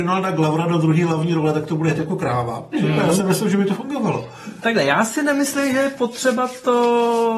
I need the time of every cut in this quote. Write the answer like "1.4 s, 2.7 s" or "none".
2.7 s